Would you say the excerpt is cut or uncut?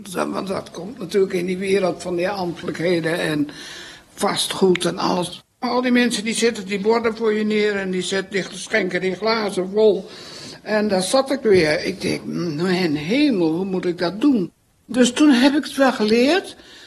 uncut